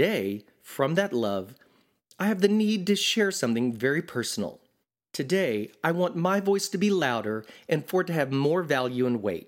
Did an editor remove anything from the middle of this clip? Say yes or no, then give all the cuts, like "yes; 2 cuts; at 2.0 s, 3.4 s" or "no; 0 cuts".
no; 0 cuts